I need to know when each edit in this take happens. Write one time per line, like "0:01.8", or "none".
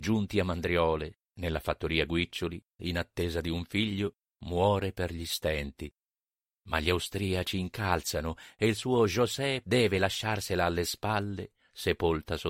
0:02.8
0:09.6